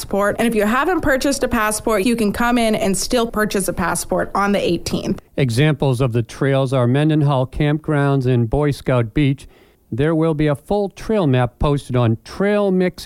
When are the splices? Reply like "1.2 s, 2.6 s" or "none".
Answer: 2.0 s